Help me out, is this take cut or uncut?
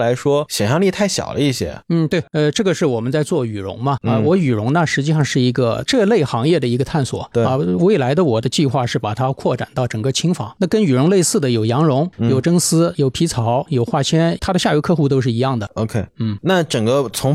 cut